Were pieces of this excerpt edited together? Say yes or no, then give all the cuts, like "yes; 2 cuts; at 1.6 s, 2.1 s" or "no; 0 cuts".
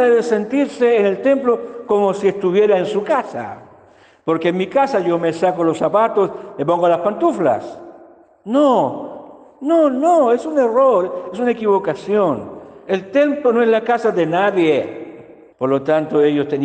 yes; 1 cut; at 15.5 s